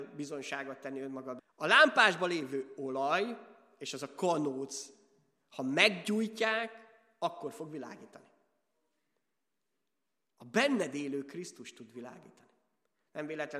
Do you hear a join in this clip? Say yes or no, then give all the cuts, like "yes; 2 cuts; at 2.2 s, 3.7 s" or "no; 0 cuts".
yes; 1 cut; at 1.4 s